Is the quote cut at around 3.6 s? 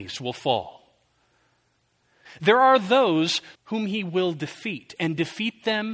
yes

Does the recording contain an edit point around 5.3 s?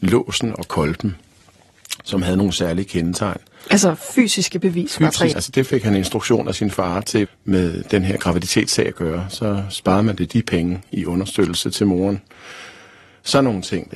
yes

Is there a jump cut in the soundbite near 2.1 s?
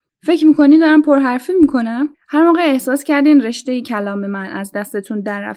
yes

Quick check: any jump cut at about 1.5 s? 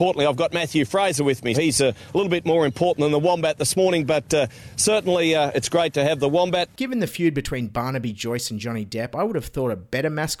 yes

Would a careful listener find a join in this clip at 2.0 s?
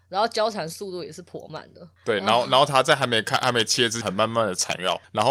yes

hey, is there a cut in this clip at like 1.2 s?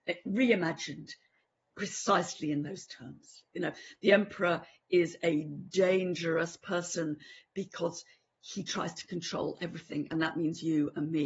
no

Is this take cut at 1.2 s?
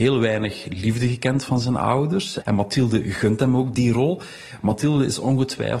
no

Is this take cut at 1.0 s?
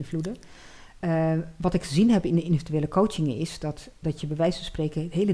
no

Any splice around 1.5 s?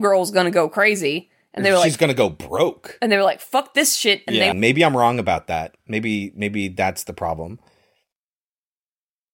no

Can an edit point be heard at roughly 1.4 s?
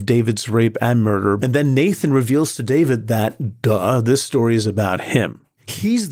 yes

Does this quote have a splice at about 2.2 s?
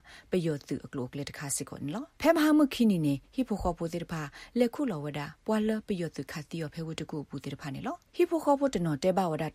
yes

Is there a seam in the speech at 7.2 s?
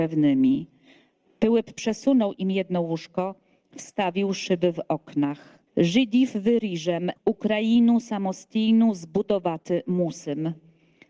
yes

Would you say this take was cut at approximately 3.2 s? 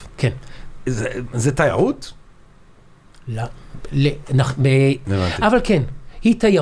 no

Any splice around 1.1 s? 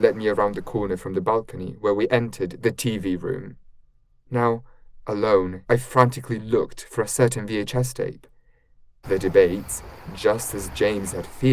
no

